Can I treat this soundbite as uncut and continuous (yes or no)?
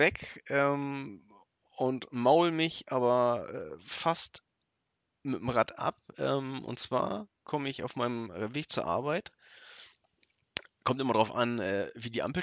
yes